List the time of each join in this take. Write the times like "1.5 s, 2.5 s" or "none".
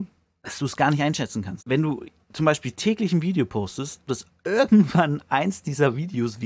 1.6 s, 4.1 s